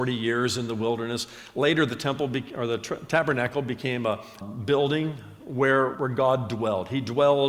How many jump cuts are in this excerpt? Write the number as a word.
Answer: two